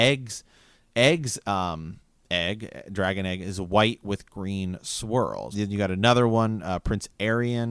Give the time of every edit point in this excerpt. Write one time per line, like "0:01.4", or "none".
0:05.5